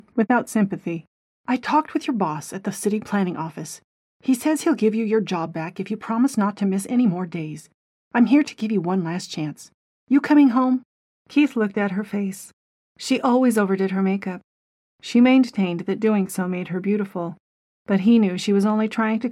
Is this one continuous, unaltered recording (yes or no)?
yes